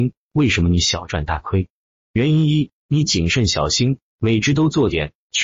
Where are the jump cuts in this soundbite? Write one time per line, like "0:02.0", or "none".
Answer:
none